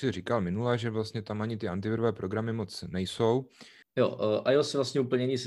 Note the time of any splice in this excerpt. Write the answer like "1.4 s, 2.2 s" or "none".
3.8 s